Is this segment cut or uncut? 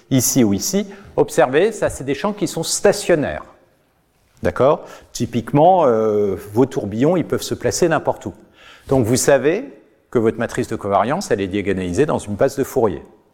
uncut